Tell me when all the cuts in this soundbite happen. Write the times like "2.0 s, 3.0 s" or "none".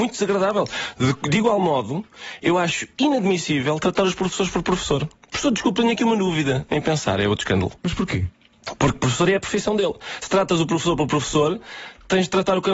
none